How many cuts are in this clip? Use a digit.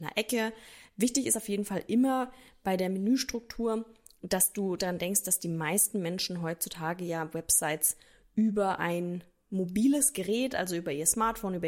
0